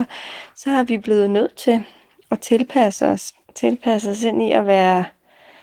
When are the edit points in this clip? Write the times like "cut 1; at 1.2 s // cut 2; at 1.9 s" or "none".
cut 1; at 3.4 s